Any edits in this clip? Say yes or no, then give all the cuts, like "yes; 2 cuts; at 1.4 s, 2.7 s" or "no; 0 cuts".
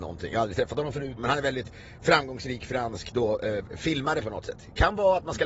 yes; 1 cut; at 1.2 s